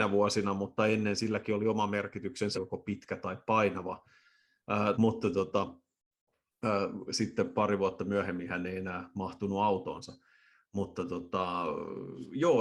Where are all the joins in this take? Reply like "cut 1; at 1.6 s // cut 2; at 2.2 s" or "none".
cut 1; at 2.5 s // cut 2; at 4.9 s